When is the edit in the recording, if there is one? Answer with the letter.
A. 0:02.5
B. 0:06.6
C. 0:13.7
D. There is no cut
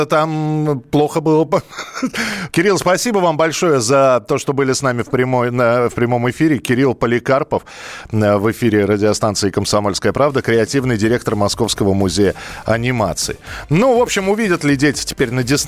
A